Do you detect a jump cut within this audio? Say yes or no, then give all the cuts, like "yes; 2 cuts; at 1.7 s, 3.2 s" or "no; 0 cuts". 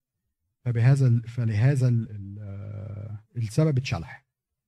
yes; 2 cuts; at 2.1 s, 3.3 s